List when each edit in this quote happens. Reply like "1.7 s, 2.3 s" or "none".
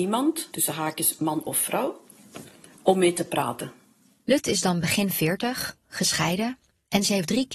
none